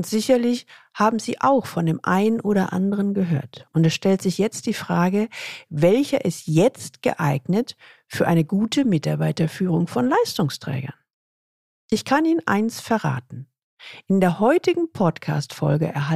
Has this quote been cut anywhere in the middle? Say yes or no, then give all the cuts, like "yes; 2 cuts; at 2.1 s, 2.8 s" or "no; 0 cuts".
no; 0 cuts